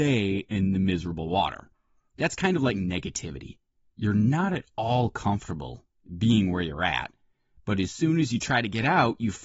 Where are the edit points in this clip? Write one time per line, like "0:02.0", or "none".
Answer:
none